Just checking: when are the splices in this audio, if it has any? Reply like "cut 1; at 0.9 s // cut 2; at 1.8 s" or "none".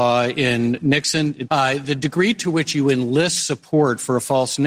cut 1; at 1.5 s